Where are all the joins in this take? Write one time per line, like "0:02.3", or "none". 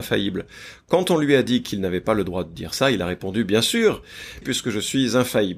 0:04.4